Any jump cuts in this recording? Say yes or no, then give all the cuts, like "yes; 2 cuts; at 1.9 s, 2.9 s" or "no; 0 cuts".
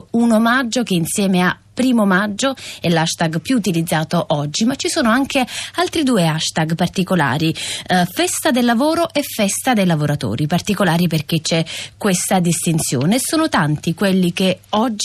no; 0 cuts